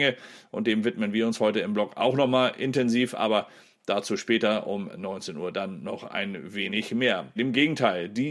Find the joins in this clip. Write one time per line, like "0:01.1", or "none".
0:07.4